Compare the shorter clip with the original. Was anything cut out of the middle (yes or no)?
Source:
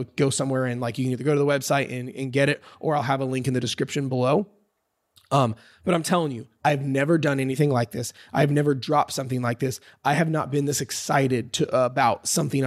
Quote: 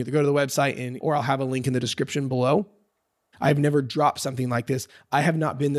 yes